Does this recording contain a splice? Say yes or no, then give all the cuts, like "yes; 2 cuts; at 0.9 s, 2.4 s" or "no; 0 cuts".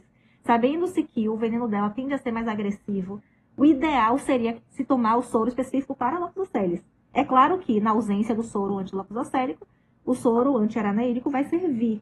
no; 0 cuts